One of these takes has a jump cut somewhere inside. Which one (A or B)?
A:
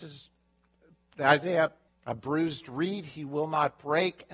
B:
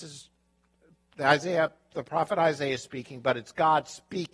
A